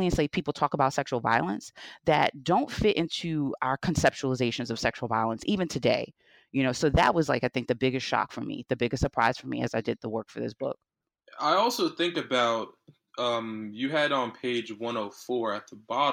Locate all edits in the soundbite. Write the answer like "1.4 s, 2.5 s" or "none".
none